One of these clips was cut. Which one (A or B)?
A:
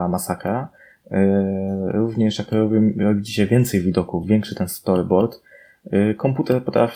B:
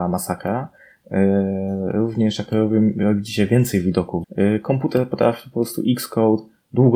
B